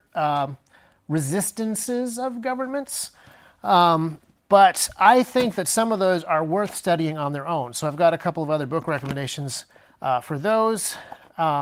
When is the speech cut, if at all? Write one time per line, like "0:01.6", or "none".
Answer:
none

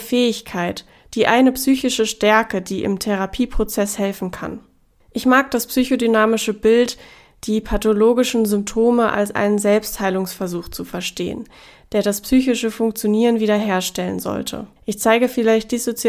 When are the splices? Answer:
0:14.8

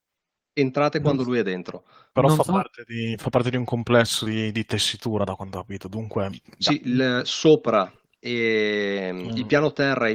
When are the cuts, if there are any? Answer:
none

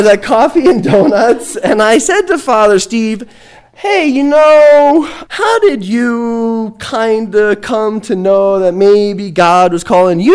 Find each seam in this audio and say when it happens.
0:05.3

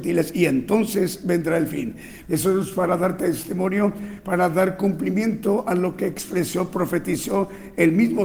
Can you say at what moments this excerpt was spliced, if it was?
0:02.2

